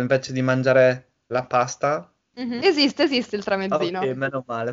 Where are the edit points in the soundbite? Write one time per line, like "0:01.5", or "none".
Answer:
0:01.3
0:02.6